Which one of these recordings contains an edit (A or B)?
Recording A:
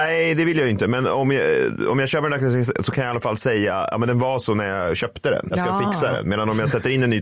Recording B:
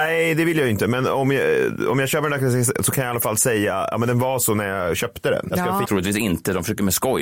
B